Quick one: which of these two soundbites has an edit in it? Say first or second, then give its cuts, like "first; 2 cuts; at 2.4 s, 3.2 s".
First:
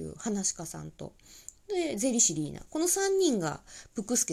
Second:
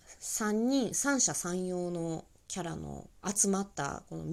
second; 1 cut; at 3.2 s